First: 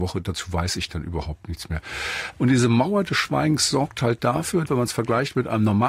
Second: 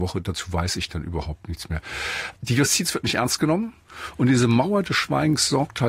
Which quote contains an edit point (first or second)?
first